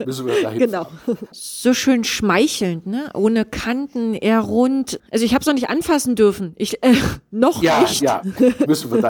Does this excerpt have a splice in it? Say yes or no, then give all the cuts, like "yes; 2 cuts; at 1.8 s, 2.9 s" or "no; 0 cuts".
yes; 2 cuts; at 1.3 s, 5.0 s